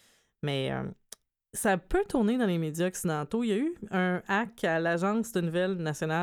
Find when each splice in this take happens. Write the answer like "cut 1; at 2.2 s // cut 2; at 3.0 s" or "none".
none